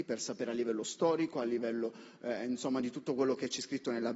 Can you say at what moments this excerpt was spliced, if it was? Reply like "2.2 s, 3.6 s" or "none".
none